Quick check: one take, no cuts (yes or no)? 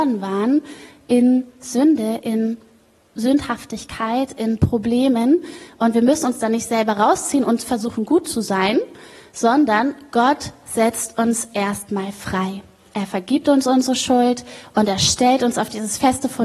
yes